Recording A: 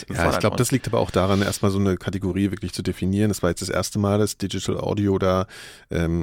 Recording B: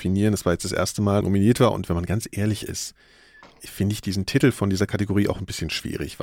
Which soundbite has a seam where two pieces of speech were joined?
B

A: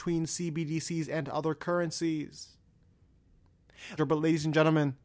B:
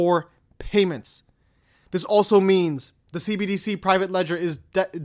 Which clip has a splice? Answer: A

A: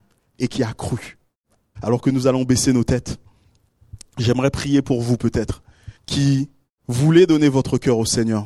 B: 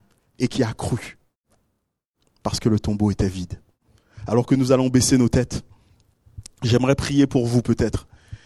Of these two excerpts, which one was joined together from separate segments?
A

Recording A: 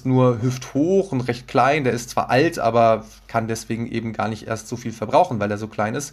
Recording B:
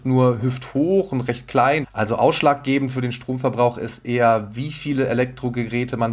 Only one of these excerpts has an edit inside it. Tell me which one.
B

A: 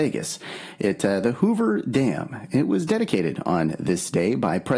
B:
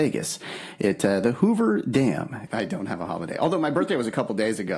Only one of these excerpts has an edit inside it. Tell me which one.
B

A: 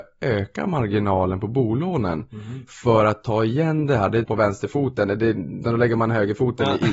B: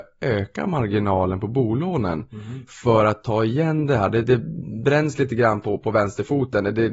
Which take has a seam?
A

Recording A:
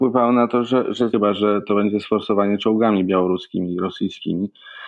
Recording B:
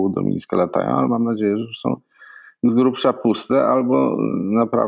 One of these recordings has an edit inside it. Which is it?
A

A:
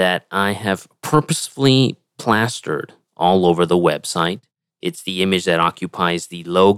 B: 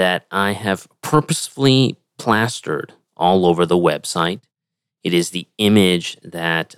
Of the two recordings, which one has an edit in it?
A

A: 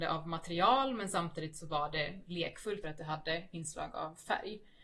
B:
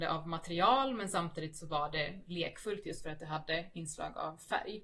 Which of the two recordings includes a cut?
A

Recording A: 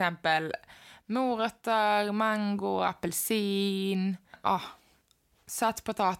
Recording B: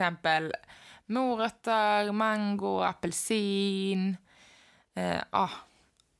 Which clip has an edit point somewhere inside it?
A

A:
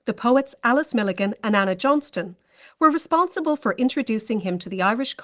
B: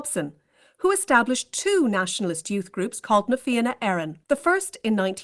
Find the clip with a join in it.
B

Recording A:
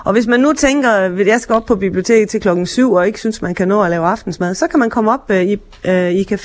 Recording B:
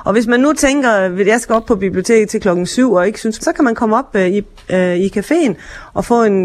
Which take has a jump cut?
B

